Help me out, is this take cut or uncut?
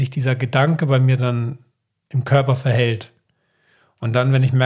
uncut